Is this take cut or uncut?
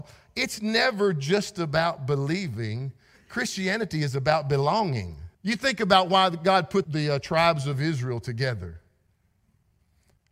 cut